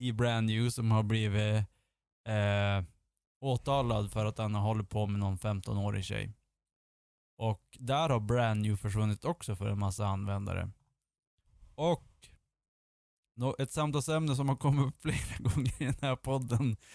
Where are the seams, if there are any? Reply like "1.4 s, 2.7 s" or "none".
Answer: 7.2 s

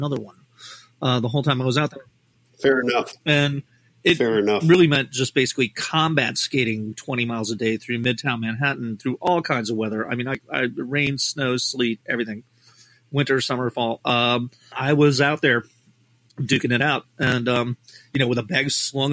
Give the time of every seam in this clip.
none

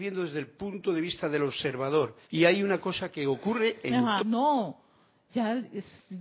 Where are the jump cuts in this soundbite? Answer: 2.2 s, 4.2 s

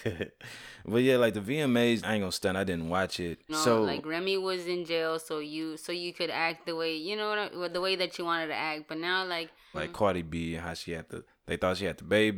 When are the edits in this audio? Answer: 2.0 s, 3.5 s, 9.7 s

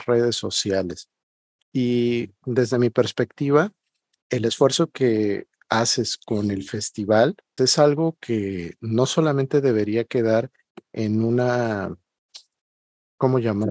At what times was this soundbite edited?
1.6 s, 7.6 s

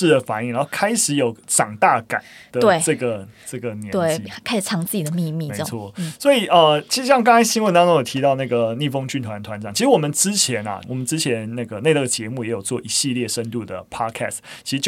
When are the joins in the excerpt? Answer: 10.8 s

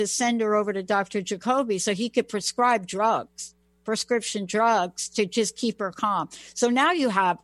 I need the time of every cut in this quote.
none

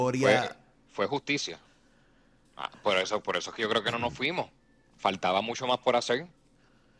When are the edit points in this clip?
2.5 s

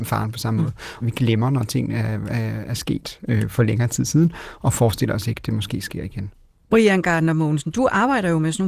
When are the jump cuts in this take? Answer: 1.0 s

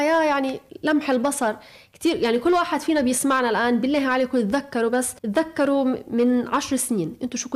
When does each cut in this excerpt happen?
5.2 s

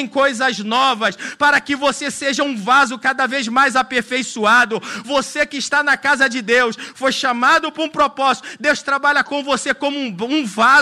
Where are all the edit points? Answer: none

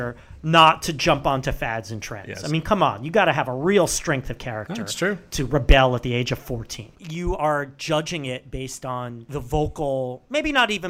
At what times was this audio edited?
6.9 s

